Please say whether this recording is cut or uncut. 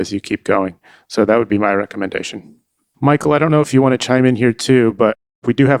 uncut